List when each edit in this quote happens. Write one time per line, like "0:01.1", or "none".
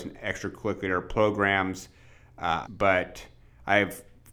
0:02.6